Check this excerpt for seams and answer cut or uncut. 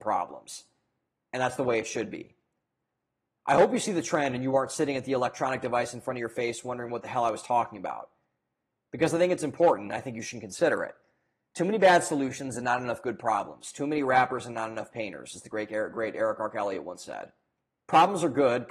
cut